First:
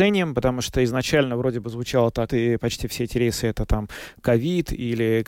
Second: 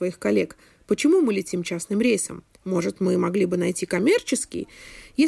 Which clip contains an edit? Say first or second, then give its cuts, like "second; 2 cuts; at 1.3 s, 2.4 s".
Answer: first; 1 cut; at 2.3 s